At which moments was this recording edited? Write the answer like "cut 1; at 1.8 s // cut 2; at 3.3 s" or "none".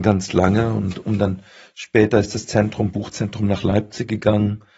none